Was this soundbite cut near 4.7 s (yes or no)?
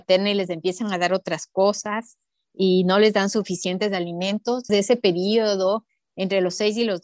yes